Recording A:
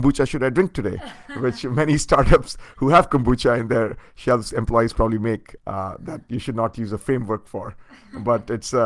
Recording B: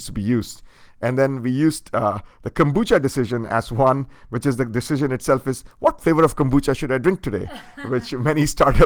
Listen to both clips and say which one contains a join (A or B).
A